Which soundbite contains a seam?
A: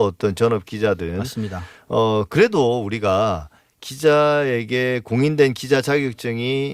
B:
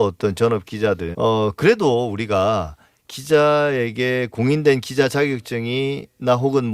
B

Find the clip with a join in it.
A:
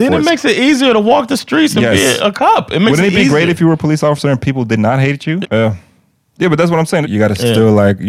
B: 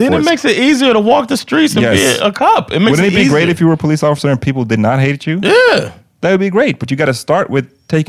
A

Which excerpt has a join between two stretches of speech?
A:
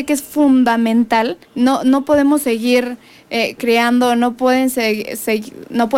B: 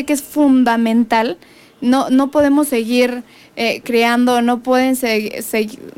A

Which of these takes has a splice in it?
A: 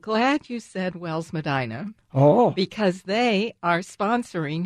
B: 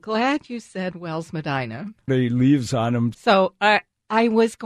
B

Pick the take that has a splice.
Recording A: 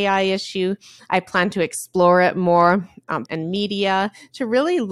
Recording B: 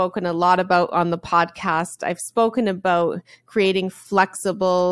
A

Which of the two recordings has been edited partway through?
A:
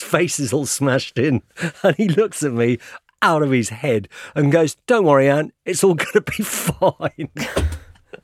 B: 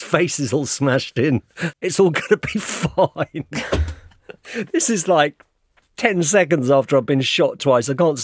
B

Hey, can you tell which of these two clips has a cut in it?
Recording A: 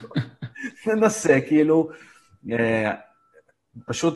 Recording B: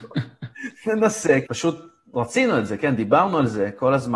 B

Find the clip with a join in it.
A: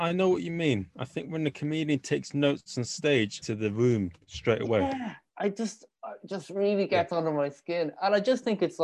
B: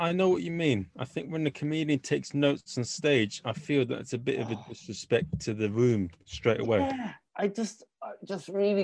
A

